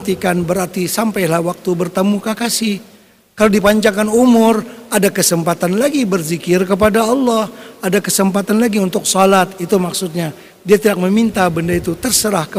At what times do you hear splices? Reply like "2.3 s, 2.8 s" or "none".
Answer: none